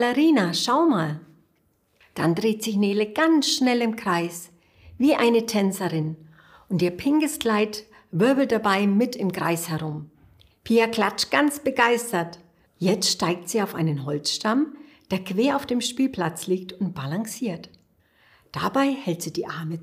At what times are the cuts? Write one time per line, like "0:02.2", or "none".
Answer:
0:10.5
0:12.7